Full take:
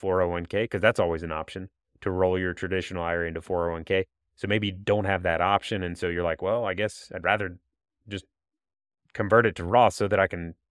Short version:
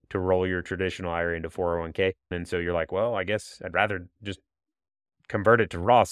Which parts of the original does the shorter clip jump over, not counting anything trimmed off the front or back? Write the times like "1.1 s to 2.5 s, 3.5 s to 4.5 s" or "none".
4.2 s to 5.8 s, 7.6 s to 8.0 s

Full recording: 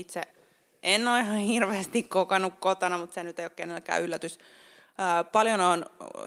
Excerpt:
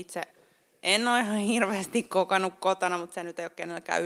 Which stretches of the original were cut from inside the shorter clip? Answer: none

